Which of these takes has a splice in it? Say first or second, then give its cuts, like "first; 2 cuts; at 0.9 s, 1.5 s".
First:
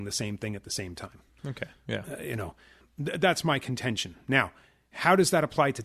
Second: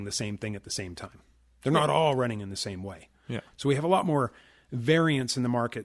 first; 1 cut; at 1.3 s